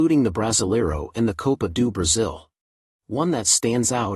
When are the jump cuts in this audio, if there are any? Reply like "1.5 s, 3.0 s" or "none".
3.0 s